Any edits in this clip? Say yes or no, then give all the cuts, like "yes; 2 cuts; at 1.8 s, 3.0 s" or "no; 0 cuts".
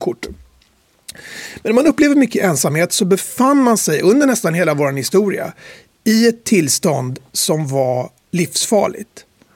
no; 0 cuts